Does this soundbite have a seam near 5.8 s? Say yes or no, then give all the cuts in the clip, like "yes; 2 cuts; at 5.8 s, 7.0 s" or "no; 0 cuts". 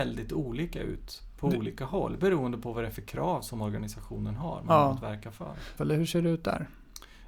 yes; 1 cut; at 5.8 s